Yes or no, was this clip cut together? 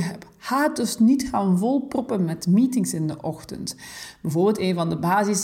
no